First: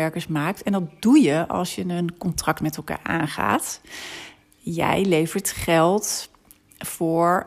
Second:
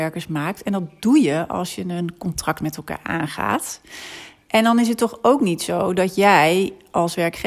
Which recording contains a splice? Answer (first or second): second